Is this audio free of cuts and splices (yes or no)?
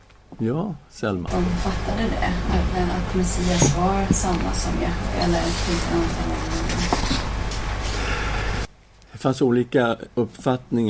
no